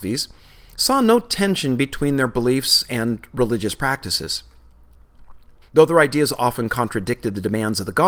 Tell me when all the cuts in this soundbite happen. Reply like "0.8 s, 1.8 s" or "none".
5.6 s